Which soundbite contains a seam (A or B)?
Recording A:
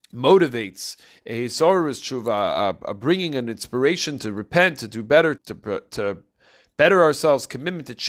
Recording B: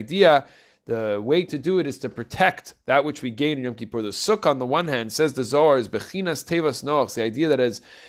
A